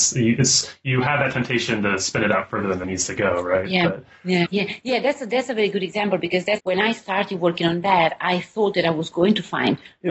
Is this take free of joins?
no; 3 cuts; at 2.8 s, 4.5 s, 6.6 s

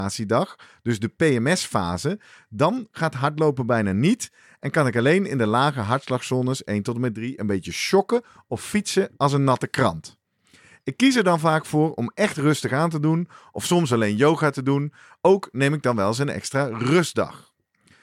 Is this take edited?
no; 0 cuts

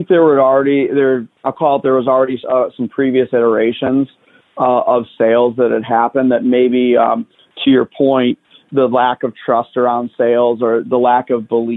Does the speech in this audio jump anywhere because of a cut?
no; 0 cuts

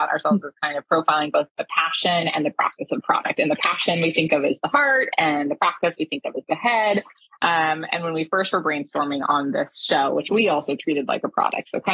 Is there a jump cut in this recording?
no; 0 cuts

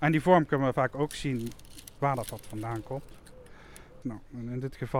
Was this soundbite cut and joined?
yes; 1 cut; at 4.0 s

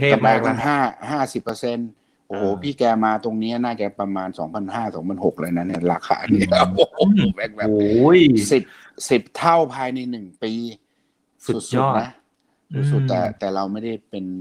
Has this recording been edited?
no; 0 cuts

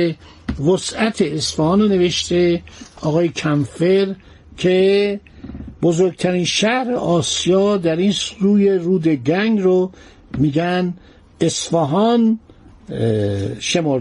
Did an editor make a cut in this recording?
no; 0 cuts

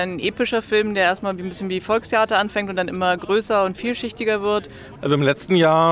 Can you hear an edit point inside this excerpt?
yes; 1 cut; at 5.0 s

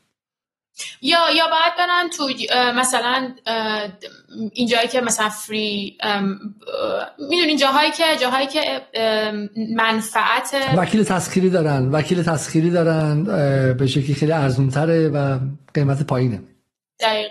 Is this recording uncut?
yes; 0 cuts

